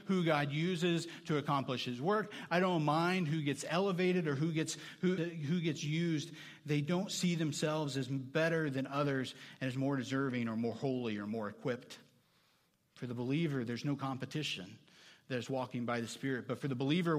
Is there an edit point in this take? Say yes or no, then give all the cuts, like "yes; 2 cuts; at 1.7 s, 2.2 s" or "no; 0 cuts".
yes; 1 cut; at 5.2 s